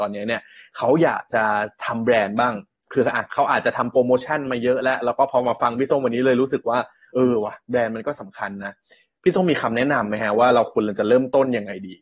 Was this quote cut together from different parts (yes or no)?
no